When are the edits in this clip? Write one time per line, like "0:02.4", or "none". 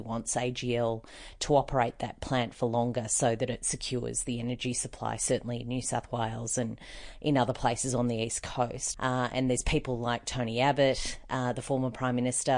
0:08.9